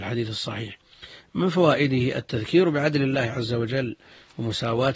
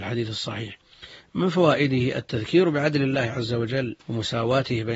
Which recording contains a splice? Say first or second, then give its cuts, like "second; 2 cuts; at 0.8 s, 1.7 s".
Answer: second; 1 cut; at 4.0 s